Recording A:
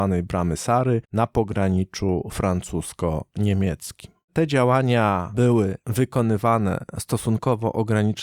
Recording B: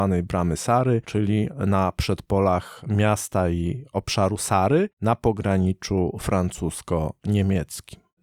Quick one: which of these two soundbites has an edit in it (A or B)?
A